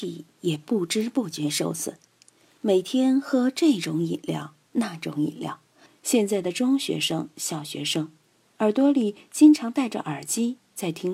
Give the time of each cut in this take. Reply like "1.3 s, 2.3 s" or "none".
5.9 s